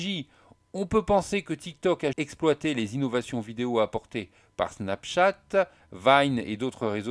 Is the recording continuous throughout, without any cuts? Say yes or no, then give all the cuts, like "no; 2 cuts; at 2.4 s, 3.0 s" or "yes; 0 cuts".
no; 1 cut; at 2.1 s